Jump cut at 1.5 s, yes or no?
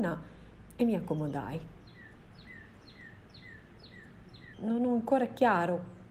no